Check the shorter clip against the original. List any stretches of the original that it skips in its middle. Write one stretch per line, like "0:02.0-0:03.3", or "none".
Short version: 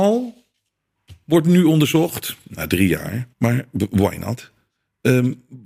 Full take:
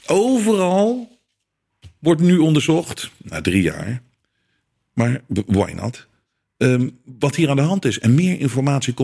0:04.1-0:04.9